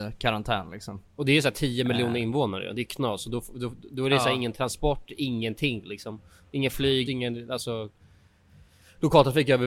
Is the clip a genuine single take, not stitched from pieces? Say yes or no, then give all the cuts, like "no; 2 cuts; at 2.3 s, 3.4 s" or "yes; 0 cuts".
no; 1 cut; at 7.1 s